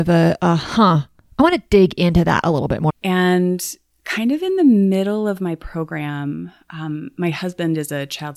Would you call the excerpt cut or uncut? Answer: cut